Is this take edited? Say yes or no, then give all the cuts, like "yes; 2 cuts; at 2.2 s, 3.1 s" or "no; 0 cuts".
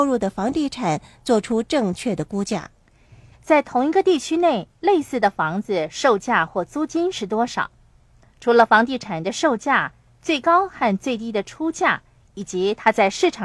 yes; 1 cut; at 3.3 s